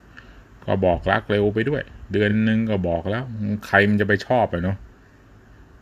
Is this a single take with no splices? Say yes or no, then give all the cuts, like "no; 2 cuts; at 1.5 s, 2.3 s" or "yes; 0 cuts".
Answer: yes; 0 cuts